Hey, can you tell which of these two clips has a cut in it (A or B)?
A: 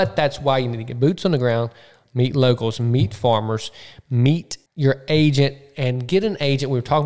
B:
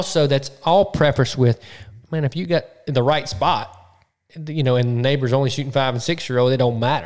A